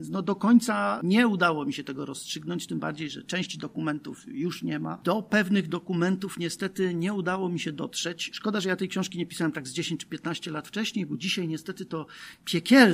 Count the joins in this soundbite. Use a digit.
0